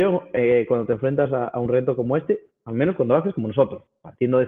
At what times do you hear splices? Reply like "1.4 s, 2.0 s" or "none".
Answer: none

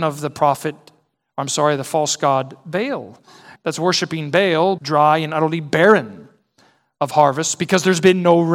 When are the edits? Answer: 3.6 s, 4.8 s

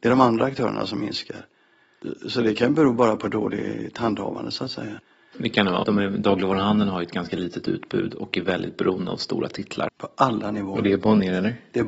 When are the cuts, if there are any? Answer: 5.8 s, 9.9 s

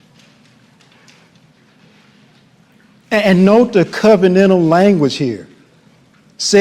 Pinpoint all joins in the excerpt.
none

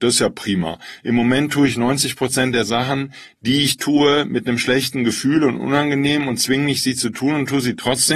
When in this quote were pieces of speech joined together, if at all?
none

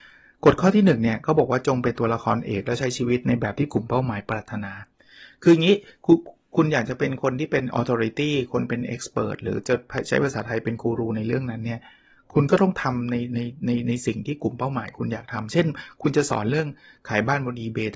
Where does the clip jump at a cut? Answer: none

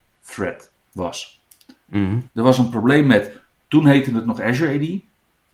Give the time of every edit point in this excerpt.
0.9 s, 2.3 s

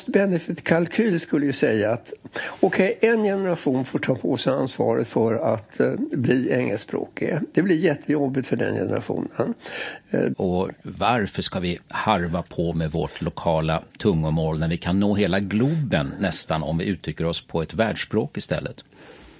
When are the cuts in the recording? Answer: 10.3 s

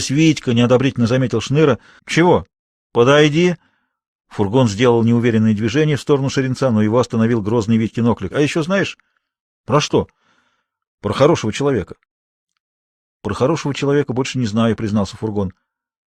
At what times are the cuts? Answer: 2.0 s, 8.3 s

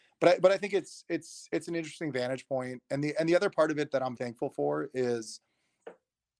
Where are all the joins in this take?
4.2 s

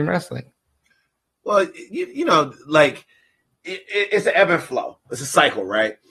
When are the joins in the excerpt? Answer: none

